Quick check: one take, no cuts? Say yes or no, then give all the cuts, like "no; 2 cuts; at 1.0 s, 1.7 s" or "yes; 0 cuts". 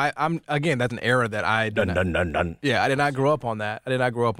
no; 1 cut; at 0.9 s